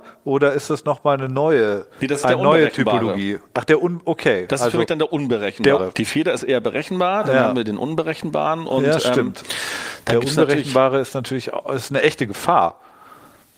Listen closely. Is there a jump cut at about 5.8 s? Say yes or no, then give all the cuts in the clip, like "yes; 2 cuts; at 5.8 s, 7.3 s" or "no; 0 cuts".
yes; 1 cut; at 5.8 s